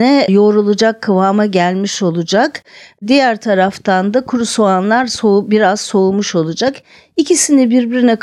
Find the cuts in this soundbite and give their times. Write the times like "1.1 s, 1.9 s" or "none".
none